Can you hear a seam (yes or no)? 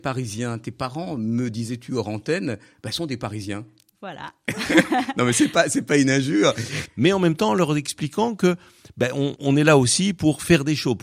yes